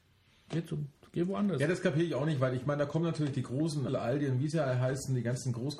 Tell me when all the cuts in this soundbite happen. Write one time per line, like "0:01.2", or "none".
0:03.9